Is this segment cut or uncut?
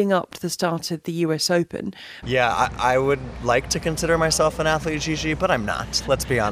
cut